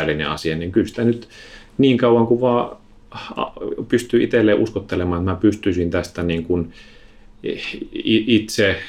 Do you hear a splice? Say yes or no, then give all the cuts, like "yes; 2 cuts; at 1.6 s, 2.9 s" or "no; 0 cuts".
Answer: no; 0 cuts